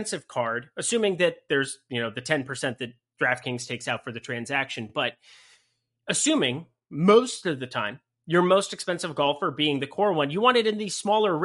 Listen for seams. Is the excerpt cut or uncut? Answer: uncut